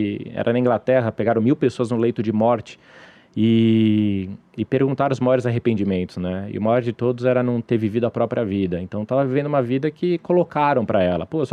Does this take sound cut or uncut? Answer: uncut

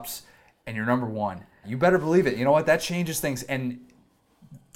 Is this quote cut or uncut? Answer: cut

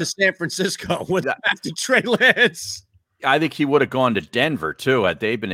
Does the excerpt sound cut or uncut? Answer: cut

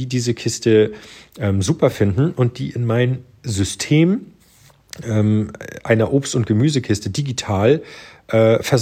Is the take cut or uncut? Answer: uncut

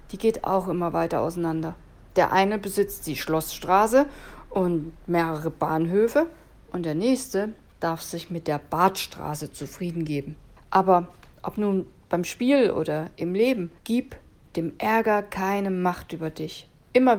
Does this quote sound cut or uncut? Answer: cut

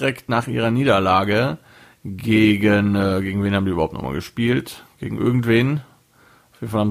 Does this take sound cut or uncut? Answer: uncut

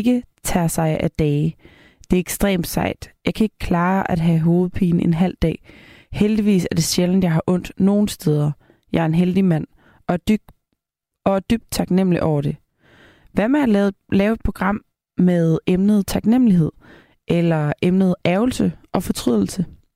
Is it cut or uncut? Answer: uncut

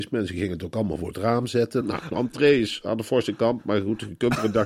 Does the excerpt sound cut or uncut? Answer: cut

